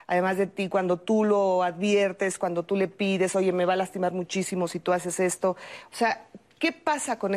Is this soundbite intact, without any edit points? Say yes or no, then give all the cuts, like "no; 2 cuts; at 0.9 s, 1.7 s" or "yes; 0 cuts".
yes; 0 cuts